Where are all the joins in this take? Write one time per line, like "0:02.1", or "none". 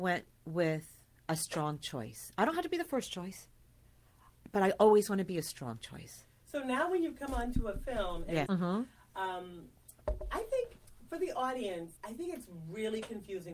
0:08.5
0:12.0